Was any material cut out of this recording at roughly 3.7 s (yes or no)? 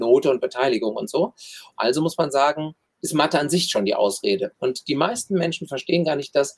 no